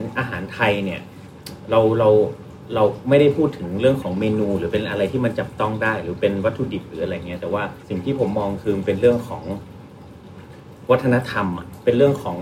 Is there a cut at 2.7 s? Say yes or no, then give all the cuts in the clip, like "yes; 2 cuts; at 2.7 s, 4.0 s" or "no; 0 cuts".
no; 1 cut; at 7.8 s